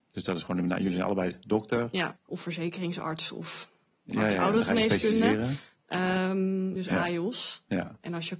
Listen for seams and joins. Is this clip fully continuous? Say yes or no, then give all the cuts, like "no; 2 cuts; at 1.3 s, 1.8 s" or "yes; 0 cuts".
no; 2 cuts; at 2.2 s, 6.8 s